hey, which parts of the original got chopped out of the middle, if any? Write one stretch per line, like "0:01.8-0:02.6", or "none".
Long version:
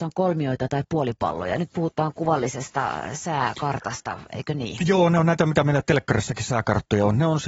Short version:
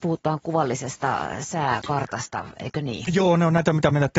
none